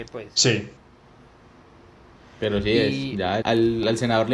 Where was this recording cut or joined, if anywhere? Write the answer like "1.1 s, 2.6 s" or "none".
3.4 s